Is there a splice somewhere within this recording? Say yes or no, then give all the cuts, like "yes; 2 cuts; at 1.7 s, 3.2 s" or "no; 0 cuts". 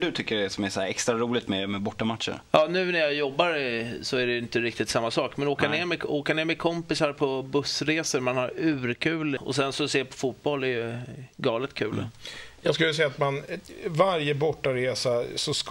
yes; 1 cut; at 9.4 s